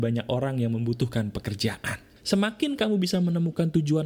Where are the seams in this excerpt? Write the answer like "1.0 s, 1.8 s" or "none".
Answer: 2.2 s